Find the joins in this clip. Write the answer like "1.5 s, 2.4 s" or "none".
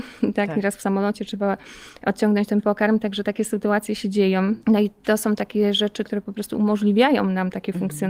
4.6 s, 6.0 s